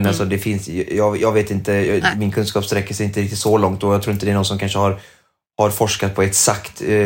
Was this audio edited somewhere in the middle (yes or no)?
no